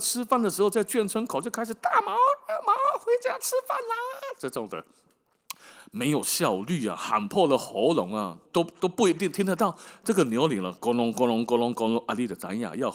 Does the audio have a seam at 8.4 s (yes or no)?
yes